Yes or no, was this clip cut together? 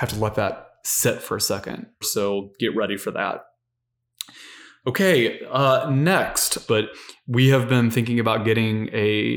yes